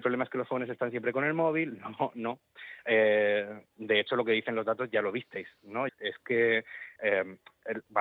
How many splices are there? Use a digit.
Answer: 2